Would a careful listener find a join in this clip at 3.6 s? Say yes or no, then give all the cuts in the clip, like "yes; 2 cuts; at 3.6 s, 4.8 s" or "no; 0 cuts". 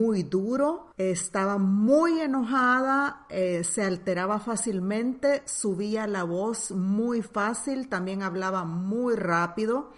no; 1 cut; at 0.9 s